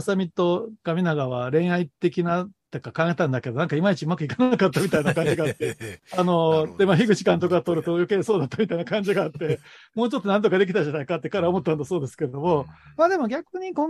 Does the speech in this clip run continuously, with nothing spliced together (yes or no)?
yes